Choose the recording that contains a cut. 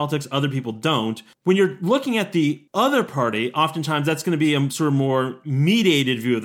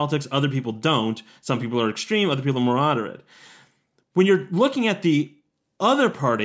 first; 2 cuts; at 1.3 s, 2.7 s

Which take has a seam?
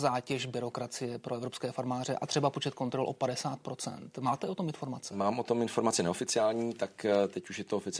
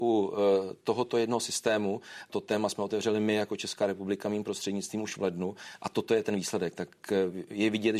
second; 1 cut; at 2.3 s

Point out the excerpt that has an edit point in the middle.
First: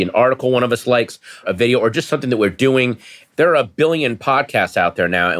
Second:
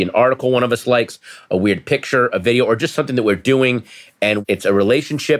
first; 2 cuts; at 1.4 s, 3.3 s

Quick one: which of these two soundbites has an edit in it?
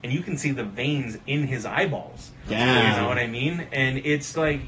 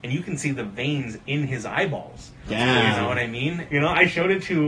second; 1 cut; at 3.7 s

